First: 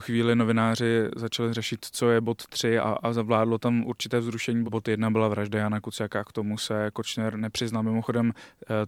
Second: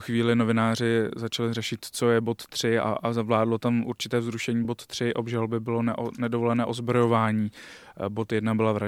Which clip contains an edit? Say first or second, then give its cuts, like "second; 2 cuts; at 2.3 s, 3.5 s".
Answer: first; 1 cut; at 4.6 s